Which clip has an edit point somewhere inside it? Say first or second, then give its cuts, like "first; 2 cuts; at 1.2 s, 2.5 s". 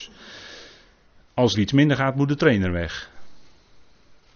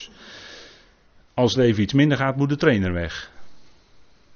first; 1 cut; at 1.5 s